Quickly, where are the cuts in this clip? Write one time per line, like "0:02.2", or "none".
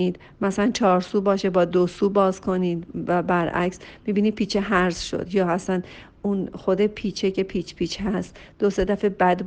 none